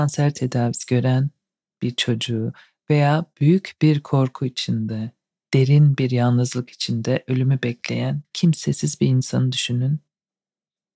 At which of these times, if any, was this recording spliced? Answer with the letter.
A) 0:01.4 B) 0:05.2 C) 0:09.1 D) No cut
D